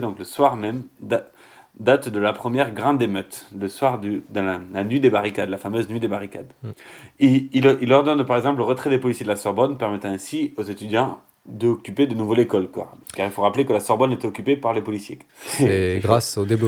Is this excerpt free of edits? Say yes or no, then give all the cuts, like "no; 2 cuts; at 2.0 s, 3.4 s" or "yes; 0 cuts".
no; 1 cut; at 15.3 s